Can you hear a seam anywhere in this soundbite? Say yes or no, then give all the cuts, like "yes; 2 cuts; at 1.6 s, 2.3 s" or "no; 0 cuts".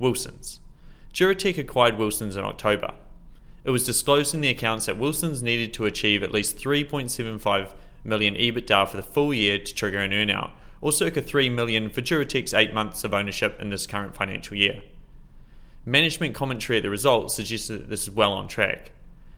no; 0 cuts